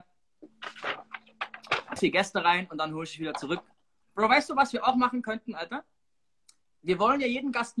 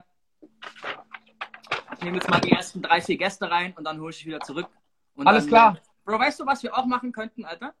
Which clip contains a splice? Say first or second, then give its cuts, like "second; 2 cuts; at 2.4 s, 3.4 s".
first; 2 cuts; at 2.0 s, 4.0 s